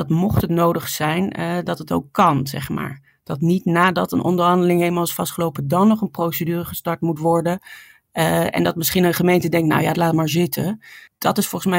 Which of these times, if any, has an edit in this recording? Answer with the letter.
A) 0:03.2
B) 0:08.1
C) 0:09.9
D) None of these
C